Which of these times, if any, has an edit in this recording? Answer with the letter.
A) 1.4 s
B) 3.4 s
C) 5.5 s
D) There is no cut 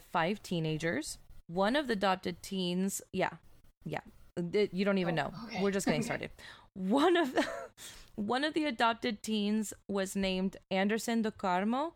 A